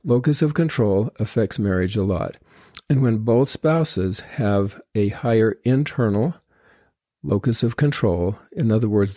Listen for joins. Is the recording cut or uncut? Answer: uncut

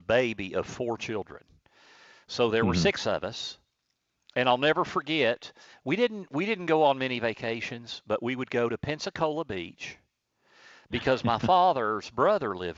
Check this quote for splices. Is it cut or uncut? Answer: uncut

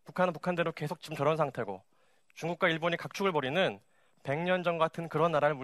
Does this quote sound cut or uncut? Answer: uncut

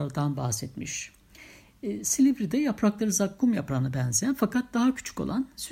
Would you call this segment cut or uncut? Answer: uncut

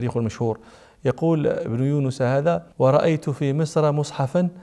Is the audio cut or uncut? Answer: cut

